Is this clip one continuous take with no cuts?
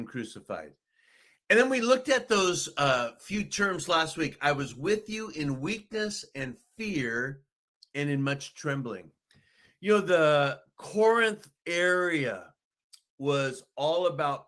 yes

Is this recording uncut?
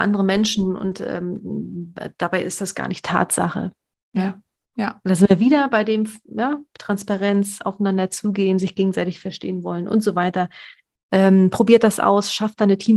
yes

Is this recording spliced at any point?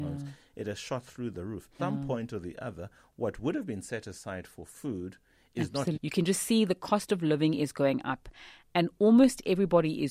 yes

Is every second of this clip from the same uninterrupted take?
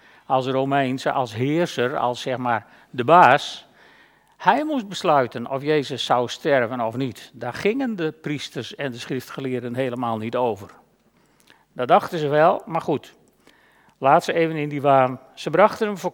yes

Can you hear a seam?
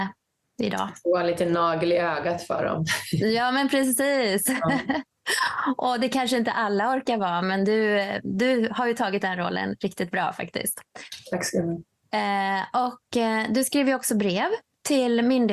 no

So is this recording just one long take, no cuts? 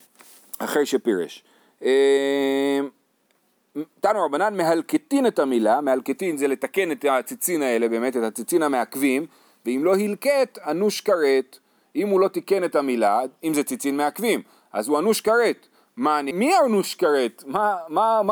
no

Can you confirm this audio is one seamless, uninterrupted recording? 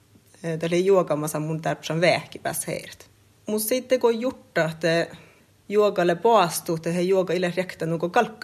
no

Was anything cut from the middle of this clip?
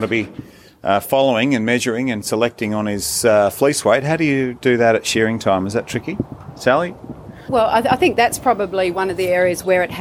yes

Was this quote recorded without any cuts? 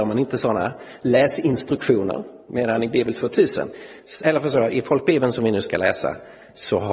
yes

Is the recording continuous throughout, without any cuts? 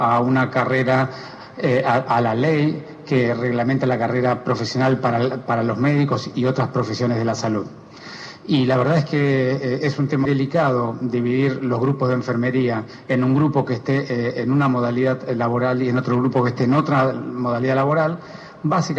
no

